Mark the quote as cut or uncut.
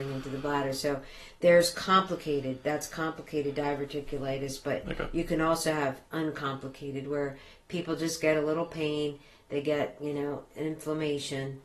uncut